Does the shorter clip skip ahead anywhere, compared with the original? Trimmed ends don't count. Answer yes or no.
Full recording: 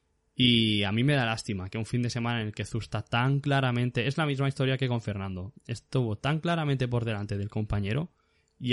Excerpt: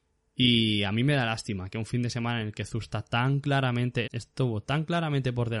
yes